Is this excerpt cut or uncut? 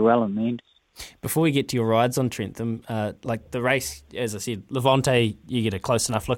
uncut